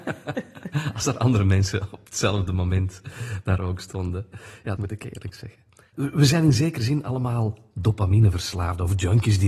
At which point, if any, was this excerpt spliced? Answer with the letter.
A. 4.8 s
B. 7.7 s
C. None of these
A